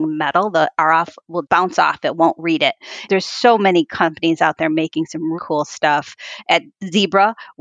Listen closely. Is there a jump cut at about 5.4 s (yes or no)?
yes